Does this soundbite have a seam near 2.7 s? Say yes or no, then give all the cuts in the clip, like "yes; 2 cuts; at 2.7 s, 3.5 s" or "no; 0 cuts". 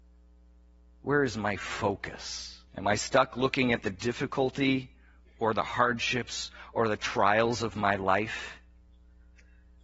yes; 1 cut; at 2.7 s